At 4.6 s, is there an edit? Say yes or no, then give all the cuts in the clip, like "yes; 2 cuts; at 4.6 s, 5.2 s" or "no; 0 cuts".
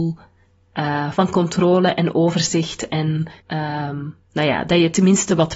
no; 1 cut; at 3.4 s